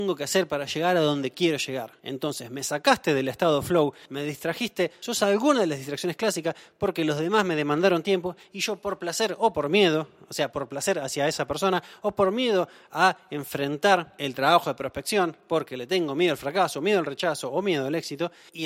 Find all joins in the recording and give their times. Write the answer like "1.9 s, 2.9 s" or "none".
none